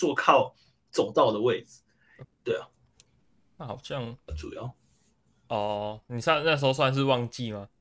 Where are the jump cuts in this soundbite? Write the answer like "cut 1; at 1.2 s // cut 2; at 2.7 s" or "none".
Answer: cut 1; at 2.2 s // cut 2; at 4.3 s